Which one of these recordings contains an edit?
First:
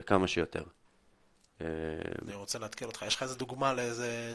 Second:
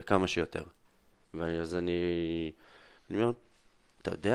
second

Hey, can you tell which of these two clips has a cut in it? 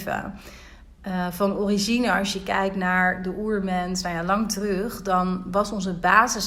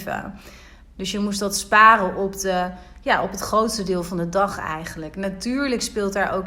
second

